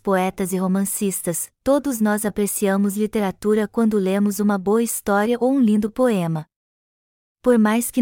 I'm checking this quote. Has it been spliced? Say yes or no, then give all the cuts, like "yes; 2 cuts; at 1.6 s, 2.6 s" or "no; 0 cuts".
no; 0 cuts